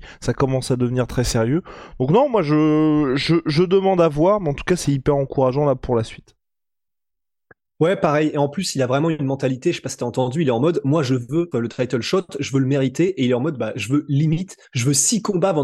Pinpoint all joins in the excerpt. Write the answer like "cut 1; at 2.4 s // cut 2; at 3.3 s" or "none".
cut 1; at 11.5 s // cut 2; at 14.6 s